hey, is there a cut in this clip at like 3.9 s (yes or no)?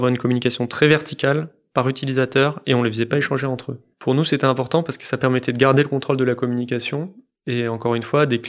no